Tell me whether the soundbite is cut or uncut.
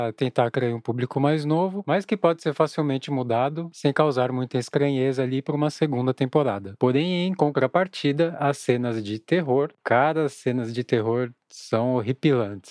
uncut